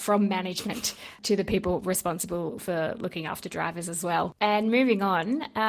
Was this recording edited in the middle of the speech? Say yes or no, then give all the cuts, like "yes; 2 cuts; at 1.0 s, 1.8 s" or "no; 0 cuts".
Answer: yes; 1 cut; at 4.3 s